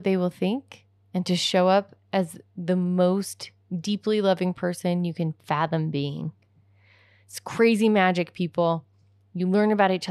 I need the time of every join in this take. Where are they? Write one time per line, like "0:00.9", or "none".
none

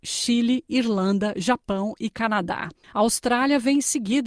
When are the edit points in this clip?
none

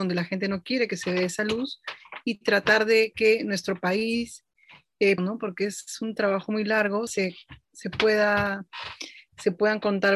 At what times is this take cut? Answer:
0:05.2
0:07.1

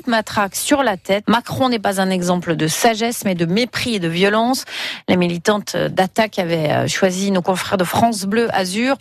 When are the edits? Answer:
0:01.2

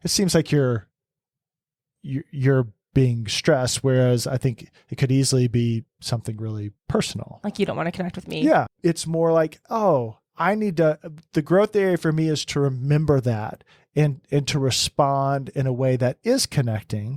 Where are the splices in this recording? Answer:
0:08.7

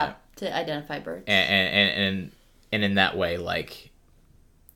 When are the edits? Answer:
none

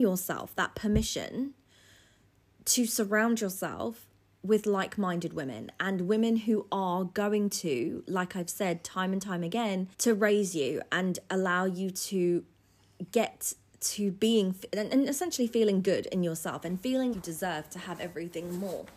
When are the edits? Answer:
0:09.9
0:17.1

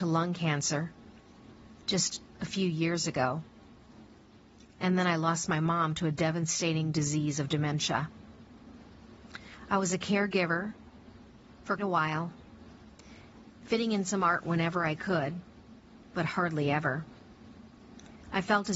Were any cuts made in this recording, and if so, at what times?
0:11.8

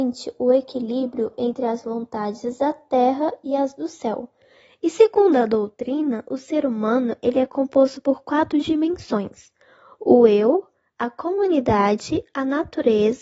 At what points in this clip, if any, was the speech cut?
none

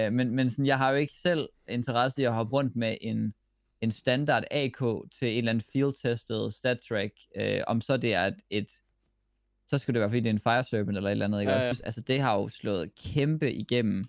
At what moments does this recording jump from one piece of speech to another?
0:11.7

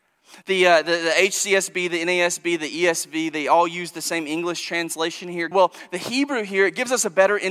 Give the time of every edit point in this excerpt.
0:05.5

